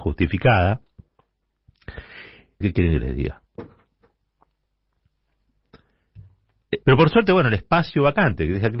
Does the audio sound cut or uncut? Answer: cut